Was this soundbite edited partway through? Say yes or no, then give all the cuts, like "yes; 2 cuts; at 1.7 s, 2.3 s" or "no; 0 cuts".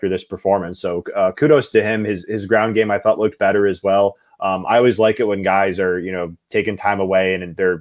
no; 0 cuts